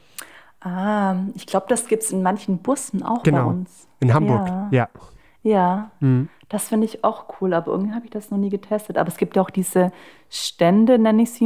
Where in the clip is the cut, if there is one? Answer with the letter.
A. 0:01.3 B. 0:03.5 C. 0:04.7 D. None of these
D